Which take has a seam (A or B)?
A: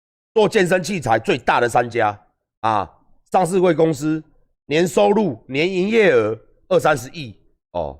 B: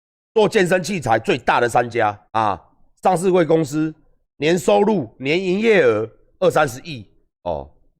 B